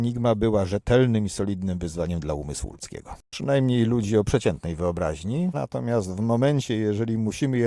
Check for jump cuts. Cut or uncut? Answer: cut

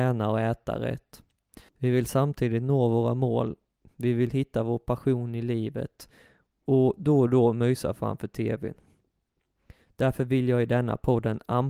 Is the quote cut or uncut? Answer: cut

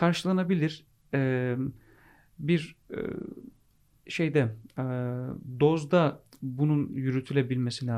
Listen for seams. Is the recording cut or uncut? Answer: uncut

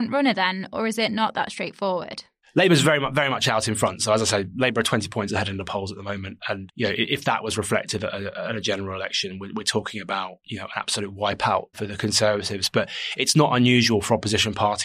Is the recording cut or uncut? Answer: uncut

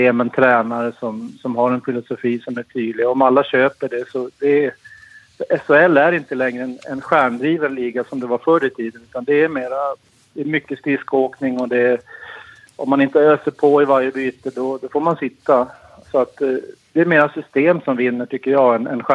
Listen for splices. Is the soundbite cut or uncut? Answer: uncut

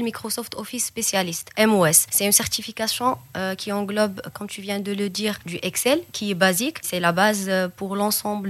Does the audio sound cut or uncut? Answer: uncut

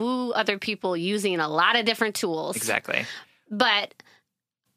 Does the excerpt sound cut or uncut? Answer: uncut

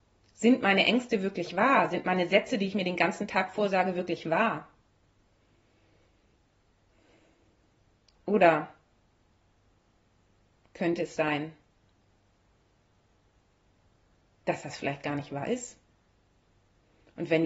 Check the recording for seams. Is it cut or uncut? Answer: uncut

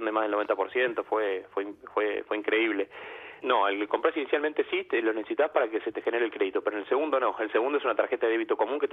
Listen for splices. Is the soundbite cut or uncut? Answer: cut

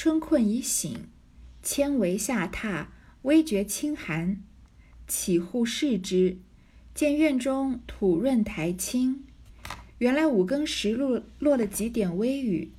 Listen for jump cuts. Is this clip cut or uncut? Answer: uncut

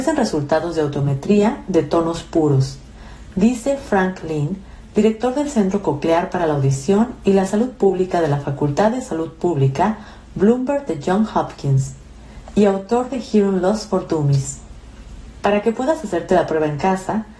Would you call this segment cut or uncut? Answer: uncut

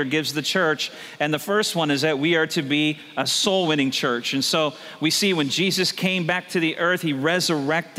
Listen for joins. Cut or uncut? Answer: uncut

